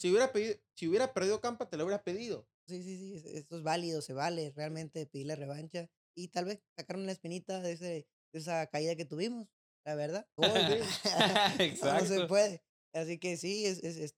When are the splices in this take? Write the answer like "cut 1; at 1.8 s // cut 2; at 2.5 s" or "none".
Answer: cut 1; at 2.7 s // cut 2; at 10.4 s